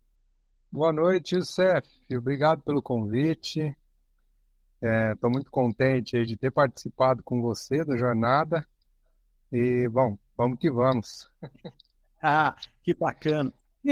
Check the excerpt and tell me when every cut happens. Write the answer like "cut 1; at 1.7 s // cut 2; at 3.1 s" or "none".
none